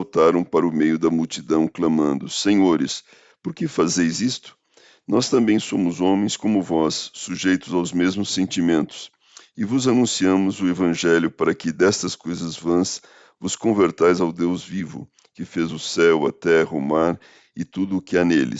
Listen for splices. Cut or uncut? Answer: uncut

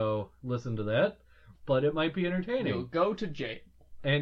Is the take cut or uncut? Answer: cut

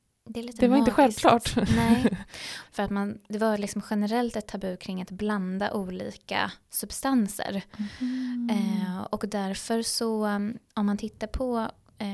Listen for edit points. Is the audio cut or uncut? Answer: cut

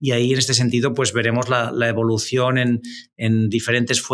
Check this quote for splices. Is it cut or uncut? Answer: uncut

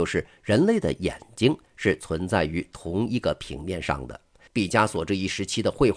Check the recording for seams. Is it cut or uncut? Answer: cut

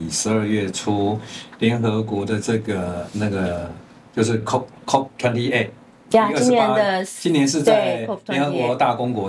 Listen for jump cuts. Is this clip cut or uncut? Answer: uncut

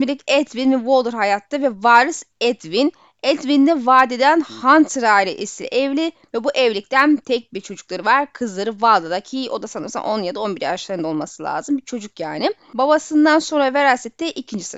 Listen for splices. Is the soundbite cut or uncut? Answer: uncut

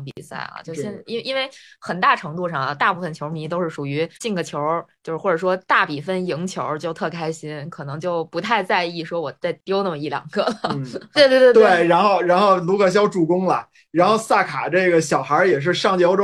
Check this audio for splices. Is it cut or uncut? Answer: cut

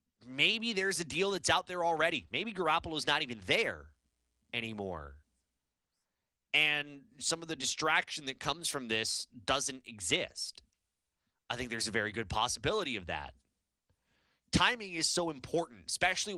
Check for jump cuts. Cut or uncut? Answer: uncut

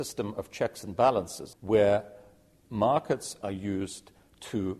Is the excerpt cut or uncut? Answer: cut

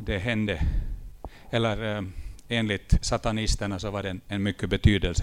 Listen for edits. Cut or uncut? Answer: uncut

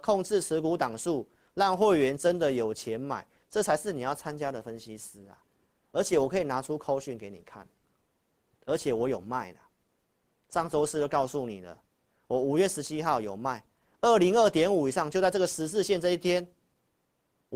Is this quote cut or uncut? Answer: uncut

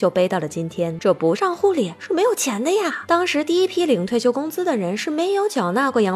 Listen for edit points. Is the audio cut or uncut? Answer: cut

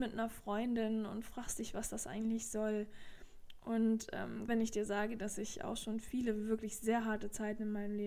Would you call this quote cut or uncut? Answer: cut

